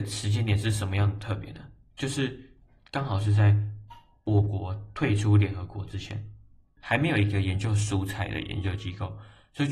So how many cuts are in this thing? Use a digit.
1